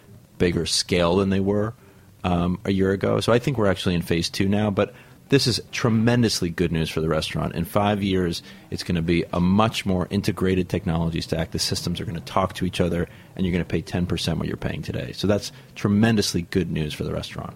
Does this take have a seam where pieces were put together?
no; 0 cuts

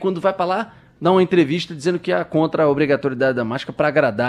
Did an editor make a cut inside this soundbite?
no; 0 cuts

